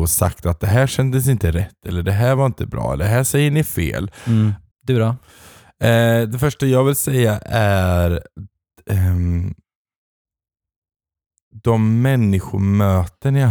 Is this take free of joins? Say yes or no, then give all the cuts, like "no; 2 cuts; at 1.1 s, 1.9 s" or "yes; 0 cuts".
no; 1 cut; at 4.7 s